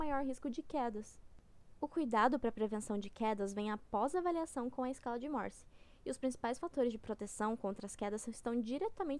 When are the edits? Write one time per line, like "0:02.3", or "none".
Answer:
none